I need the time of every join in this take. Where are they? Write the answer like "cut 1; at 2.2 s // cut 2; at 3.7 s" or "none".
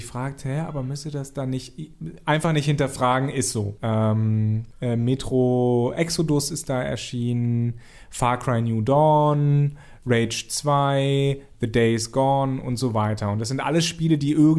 cut 1; at 3.8 s

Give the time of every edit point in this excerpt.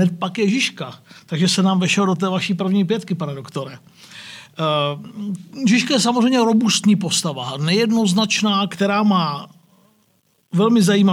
cut 1; at 8.7 s

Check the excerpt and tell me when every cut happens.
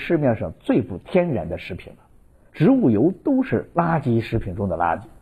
cut 1; at 2.5 s

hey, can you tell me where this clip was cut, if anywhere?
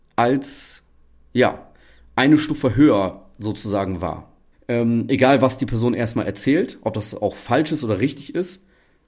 cut 1; at 4.5 s

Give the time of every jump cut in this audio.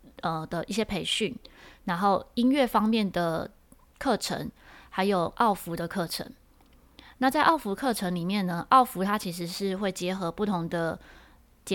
none

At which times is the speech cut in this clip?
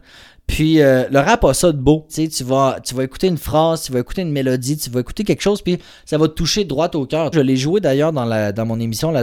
cut 1; at 2.1 s // cut 2; at 7.3 s

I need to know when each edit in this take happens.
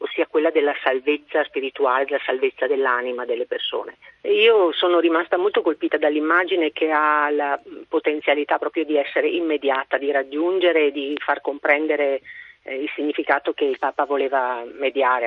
cut 1; at 4.2 s

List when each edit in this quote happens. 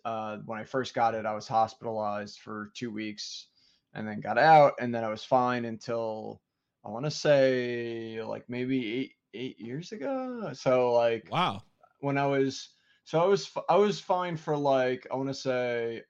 none

